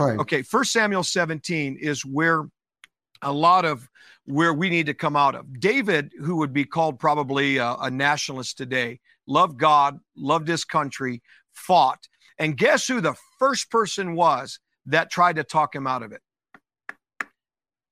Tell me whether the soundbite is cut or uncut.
uncut